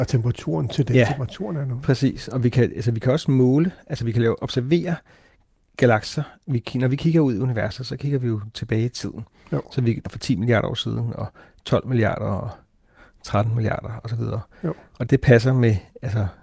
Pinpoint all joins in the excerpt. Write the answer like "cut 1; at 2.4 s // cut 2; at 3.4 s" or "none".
cut 1; at 10.1 s // cut 2; at 15.1 s